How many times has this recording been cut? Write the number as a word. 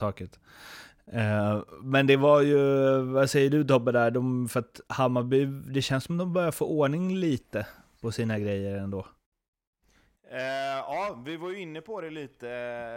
zero